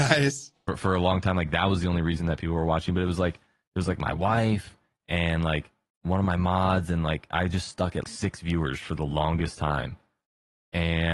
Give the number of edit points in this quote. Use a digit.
1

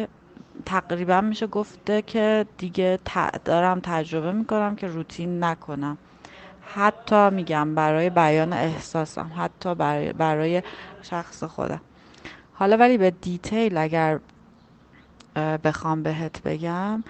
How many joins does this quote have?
1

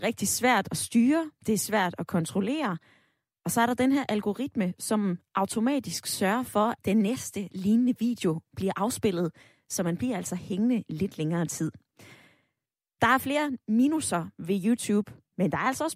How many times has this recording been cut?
1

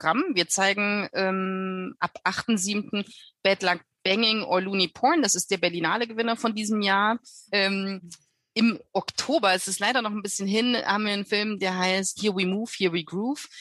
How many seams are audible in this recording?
2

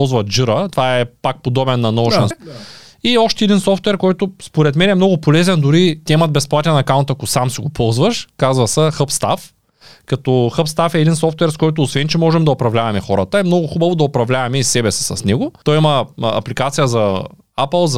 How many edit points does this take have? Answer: 1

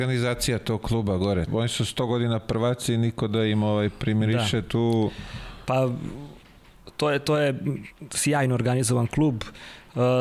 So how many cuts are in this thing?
1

